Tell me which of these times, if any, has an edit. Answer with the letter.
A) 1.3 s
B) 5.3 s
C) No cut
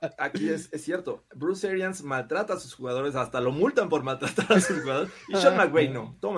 C